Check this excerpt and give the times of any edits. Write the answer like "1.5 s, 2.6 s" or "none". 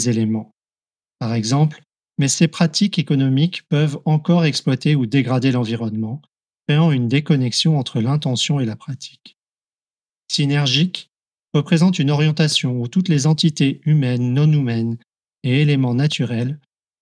2.1 s